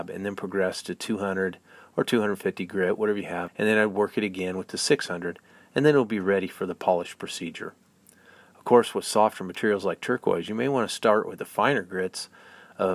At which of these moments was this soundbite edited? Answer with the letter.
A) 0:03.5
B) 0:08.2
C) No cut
A